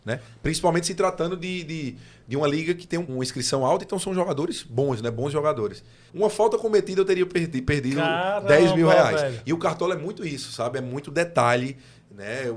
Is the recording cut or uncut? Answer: cut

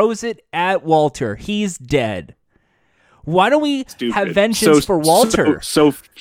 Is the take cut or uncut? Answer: uncut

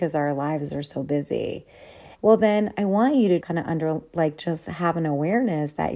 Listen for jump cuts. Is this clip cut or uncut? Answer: cut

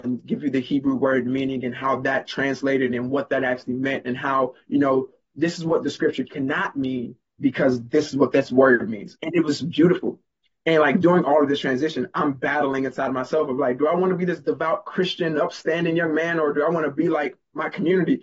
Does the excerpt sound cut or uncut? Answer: cut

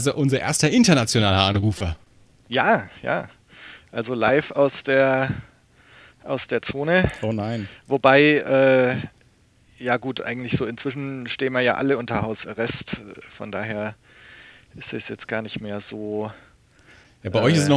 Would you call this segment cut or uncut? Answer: uncut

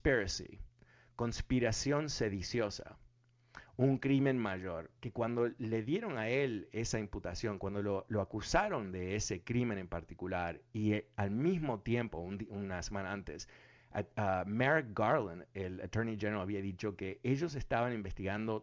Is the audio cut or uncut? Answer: uncut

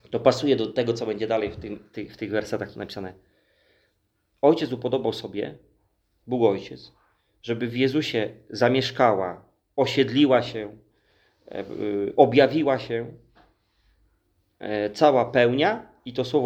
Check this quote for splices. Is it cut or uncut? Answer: uncut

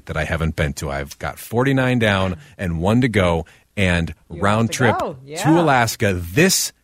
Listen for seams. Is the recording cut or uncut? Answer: uncut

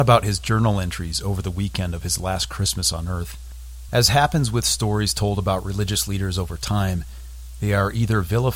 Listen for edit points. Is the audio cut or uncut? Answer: cut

